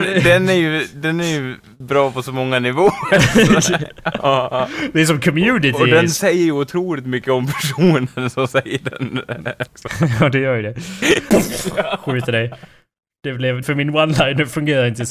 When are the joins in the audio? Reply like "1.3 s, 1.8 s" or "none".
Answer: 9.7 s, 11.3 s, 13.6 s

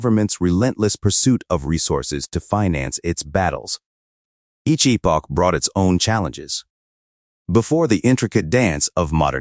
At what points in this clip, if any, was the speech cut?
none

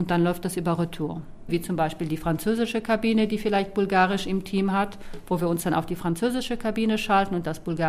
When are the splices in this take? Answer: 1.5 s

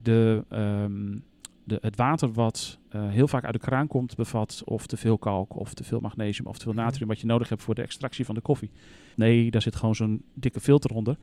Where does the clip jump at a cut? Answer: 2.9 s, 9.1 s

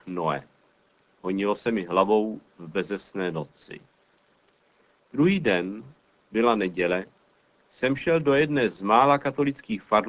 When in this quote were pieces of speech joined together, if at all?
none

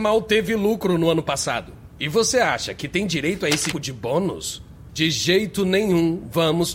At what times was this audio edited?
3.7 s, 4.9 s

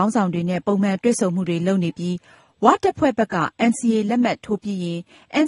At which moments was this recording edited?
none

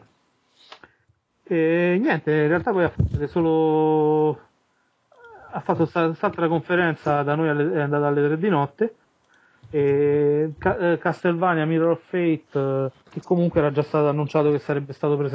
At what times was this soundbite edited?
10.6 s, 13.0 s

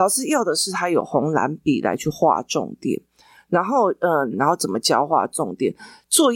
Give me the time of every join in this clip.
4.3 s

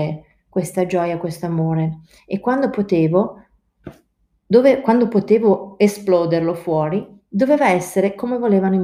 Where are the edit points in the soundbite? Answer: none

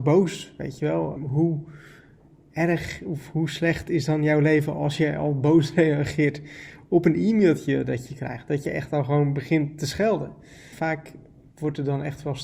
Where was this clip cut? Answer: 1.2 s, 10.7 s

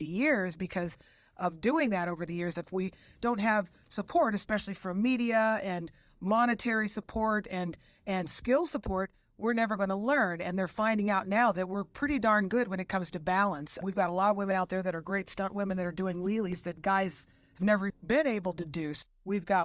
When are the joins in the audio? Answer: 2.6 s, 13.8 s, 17.9 s

